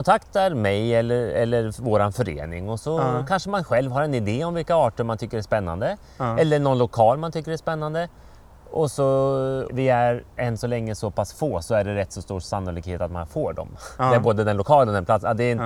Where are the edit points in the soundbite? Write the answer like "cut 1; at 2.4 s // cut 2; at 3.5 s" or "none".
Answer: cut 1; at 9.7 s